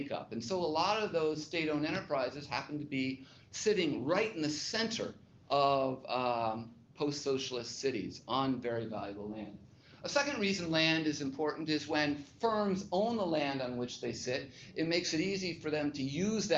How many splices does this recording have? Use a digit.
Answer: 0